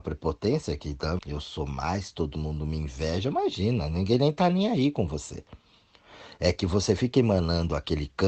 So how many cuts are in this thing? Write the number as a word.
one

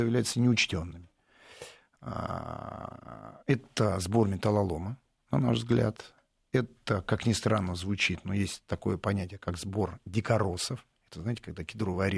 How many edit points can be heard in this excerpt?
zero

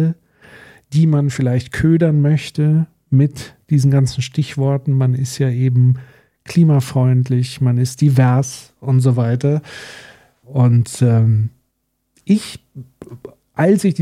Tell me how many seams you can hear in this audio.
one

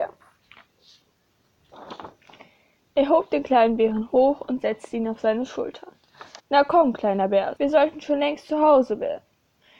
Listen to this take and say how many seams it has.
two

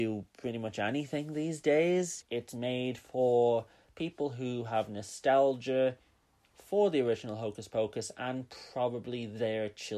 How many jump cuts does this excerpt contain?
one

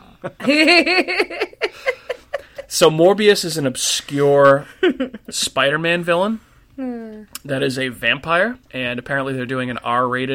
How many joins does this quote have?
one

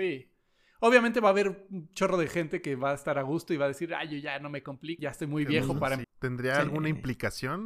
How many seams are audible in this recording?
two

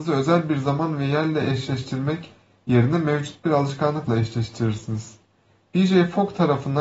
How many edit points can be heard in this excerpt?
zero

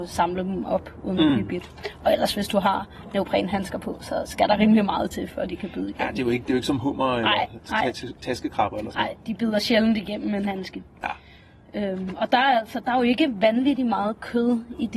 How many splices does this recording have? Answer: zero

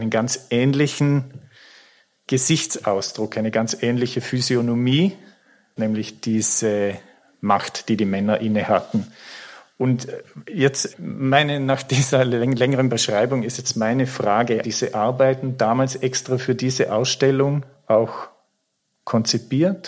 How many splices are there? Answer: two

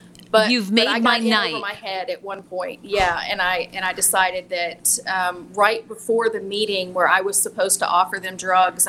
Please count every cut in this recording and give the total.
zero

